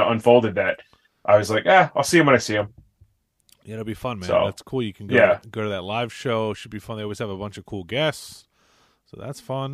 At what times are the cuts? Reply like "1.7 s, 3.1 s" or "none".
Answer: none